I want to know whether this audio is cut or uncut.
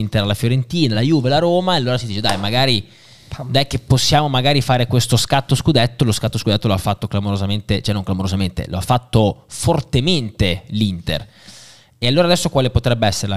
uncut